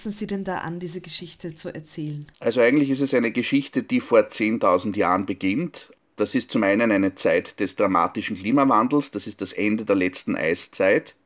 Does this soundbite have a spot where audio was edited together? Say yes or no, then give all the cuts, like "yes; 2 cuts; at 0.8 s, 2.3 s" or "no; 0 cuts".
yes; 1 cut; at 2.3 s